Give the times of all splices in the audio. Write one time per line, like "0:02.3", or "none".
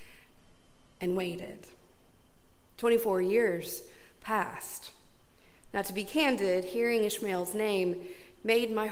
0:05.6